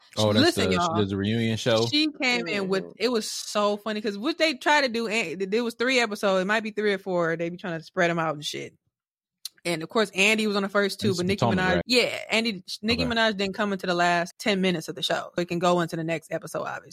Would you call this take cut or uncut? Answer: cut